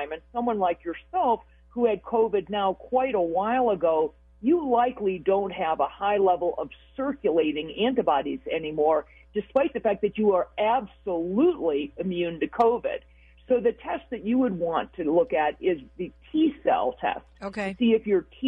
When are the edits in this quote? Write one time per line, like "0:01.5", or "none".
none